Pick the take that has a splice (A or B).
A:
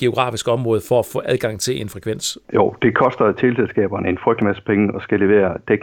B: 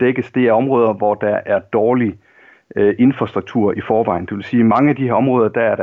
A